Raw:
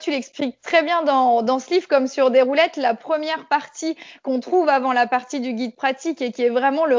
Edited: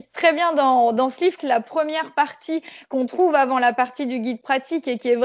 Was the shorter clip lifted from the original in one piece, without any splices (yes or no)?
no